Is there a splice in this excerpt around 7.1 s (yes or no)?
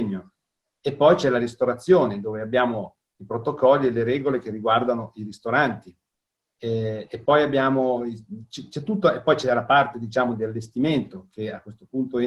no